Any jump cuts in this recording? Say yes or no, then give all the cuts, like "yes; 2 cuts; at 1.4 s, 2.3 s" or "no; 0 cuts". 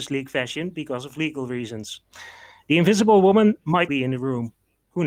yes; 1 cut; at 3.9 s